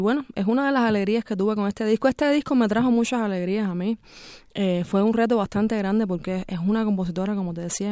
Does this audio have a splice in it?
no; 0 cuts

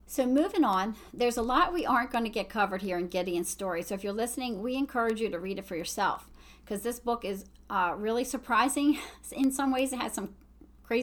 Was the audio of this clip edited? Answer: no; 0 cuts

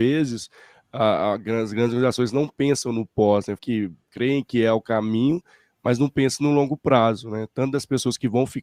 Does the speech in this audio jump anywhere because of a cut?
yes; 1 cut; at 3.6 s

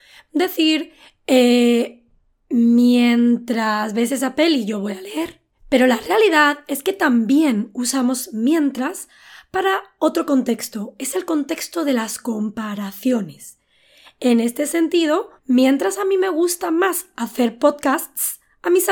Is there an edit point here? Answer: yes; 1 cut; at 15.4 s

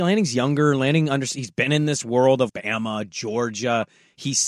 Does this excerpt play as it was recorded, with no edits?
no; 1 cut; at 2.5 s

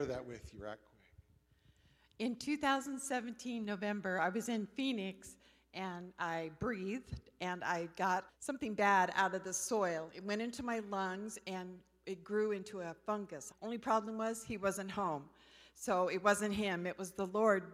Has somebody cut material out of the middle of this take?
yes; 2 cuts; at 8.3 s, 13.5 s

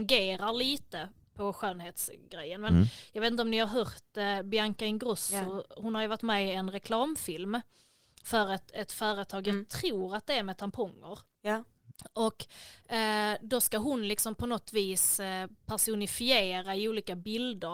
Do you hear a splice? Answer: no; 0 cuts

